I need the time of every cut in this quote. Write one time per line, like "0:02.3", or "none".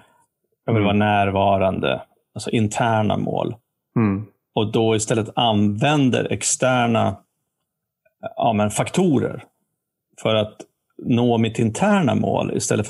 none